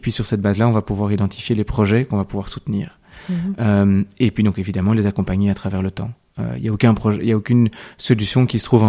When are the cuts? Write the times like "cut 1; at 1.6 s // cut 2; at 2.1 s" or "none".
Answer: none

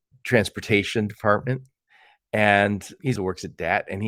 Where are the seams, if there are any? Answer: cut 1; at 3.2 s

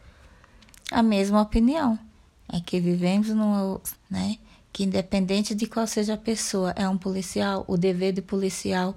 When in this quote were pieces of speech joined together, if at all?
cut 1; at 3.9 s

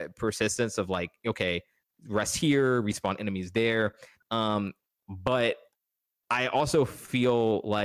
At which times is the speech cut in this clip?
cut 1; at 4.2 s

